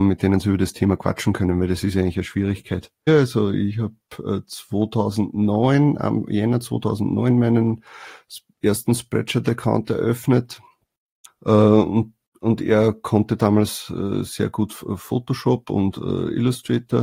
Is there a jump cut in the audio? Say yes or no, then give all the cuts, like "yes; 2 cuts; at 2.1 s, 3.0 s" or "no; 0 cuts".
yes; 2 cuts; at 3.1 s, 11.3 s